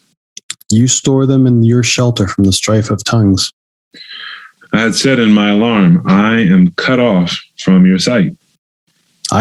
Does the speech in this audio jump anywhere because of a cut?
yes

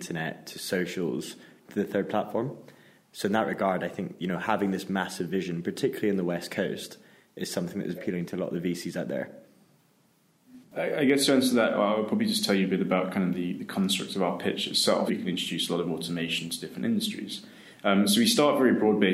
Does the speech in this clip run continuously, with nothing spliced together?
no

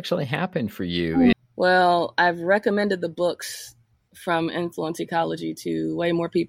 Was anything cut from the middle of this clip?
yes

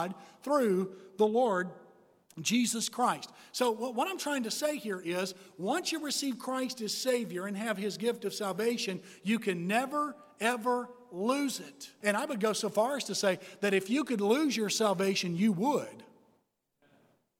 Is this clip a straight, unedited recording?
no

